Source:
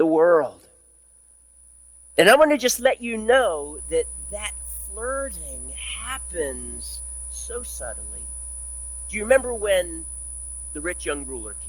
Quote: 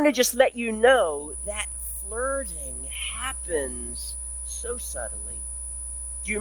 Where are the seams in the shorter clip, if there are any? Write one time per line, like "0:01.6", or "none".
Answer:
0:01.4